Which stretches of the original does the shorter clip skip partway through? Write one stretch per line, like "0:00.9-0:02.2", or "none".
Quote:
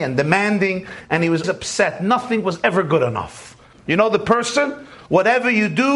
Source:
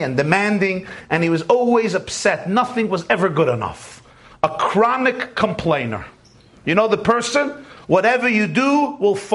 0:01.4-0:01.9
0:04.2-0:06.5